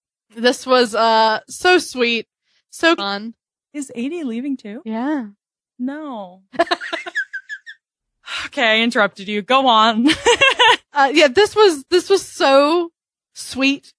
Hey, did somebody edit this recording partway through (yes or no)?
yes